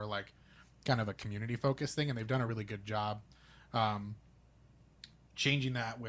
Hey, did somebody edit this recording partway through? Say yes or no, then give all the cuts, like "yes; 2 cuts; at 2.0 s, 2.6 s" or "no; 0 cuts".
no; 0 cuts